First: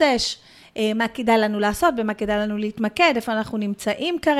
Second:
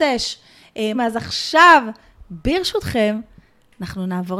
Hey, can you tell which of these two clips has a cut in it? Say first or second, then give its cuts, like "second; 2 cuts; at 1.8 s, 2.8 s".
second; 1 cut; at 0.9 s